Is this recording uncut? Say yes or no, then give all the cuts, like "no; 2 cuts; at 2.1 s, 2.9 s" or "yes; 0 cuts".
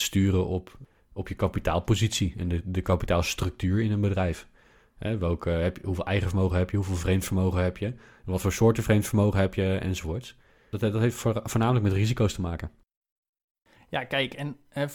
yes; 0 cuts